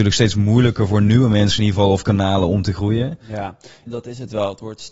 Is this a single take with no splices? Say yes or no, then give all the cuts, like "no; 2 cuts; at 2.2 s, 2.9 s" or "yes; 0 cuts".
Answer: no; 1 cut; at 3.9 s